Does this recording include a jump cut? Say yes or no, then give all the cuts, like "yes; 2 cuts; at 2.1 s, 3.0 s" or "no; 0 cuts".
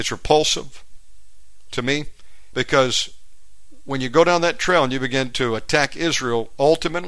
yes; 1 cut; at 2.5 s